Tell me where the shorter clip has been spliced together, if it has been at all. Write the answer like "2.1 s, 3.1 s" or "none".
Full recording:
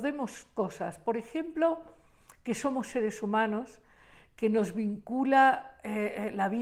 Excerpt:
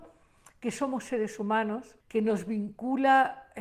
2.0 s

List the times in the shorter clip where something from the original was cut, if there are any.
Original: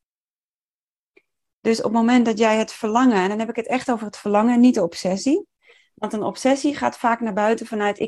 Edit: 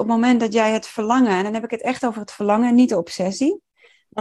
none

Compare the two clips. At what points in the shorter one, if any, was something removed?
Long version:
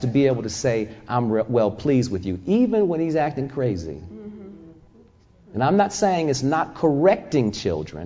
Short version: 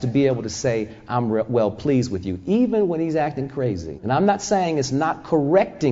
4.0 s

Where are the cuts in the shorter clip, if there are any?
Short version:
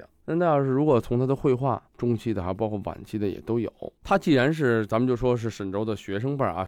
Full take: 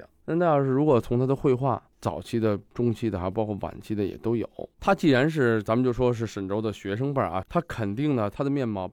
1.9 s

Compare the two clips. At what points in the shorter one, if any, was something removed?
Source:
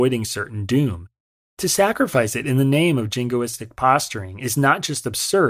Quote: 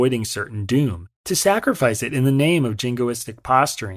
1.2 s

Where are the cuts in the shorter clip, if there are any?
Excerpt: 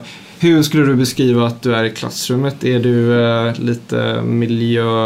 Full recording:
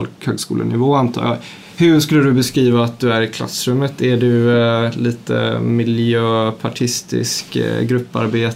none

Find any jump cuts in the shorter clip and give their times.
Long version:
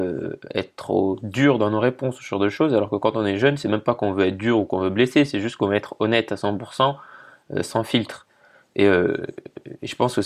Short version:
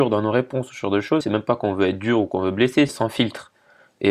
1.2 s, 2.9 s

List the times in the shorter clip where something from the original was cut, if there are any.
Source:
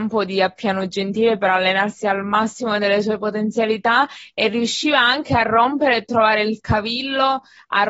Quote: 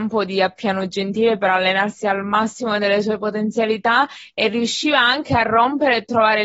none

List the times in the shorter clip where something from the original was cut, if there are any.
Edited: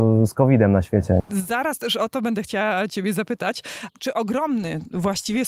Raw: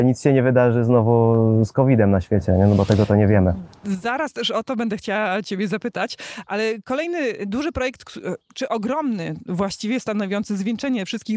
1.2 s, 3.9 s

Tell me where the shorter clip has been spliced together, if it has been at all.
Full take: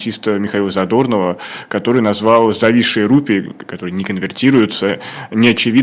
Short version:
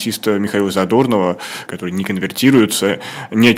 1.7 s

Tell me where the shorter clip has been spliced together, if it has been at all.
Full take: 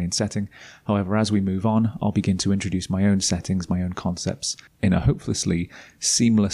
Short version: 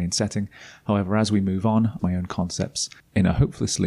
2.0 s

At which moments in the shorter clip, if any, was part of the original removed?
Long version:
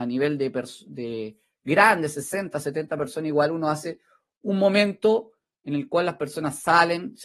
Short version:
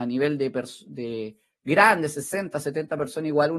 none

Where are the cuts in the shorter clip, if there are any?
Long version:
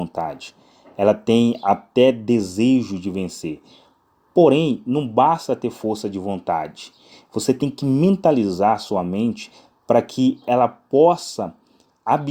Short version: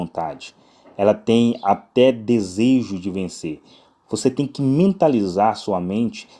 4.0 s

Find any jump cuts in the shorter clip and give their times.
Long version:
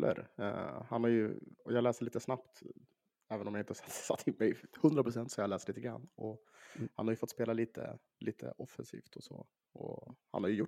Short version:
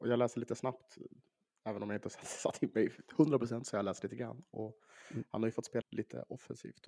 5.8 s

